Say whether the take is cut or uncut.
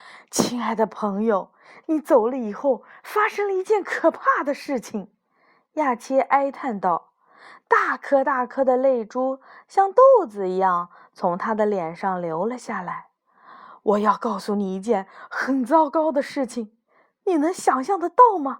uncut